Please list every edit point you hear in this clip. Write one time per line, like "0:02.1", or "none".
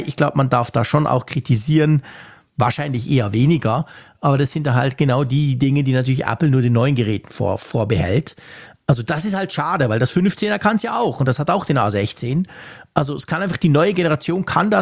0:02.5